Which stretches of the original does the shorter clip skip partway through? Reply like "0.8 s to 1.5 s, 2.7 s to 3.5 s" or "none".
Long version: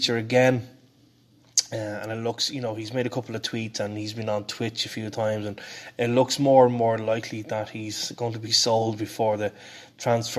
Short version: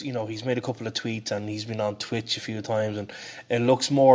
none